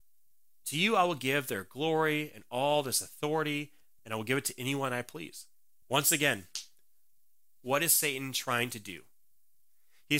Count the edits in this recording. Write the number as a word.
two